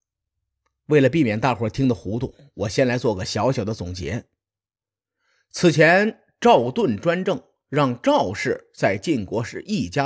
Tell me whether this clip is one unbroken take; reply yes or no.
yes